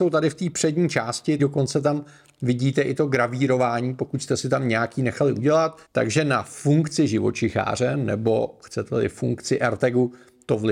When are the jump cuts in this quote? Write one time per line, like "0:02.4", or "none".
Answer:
0:01.4
0:05.8

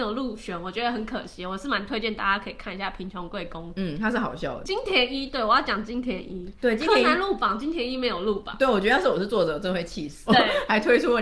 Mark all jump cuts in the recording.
0:10.3

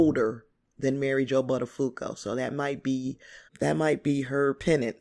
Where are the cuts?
0:03.5

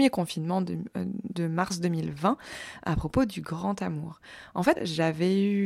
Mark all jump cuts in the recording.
0:04.8

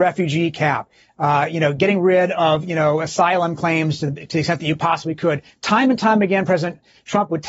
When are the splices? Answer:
0:02.3

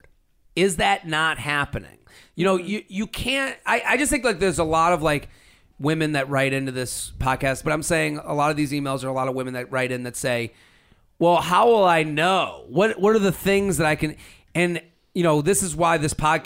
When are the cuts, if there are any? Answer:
0:07.6

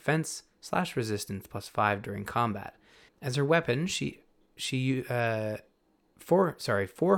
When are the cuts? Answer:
0:03.1

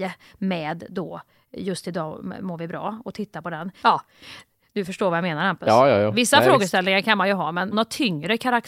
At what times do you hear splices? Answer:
0:03.8
0:07.7

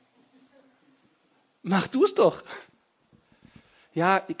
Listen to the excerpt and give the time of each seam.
none

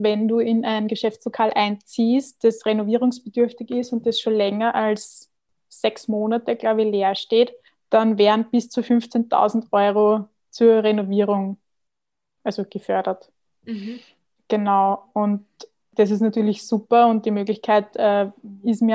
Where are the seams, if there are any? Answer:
none

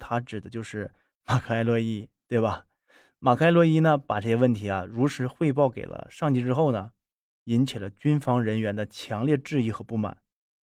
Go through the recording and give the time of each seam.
none

